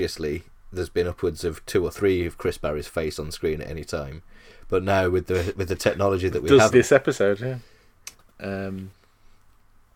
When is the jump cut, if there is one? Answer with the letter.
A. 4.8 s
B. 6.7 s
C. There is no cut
B